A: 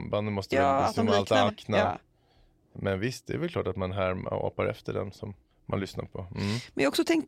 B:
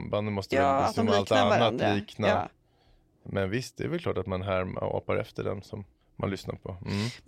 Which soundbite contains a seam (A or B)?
A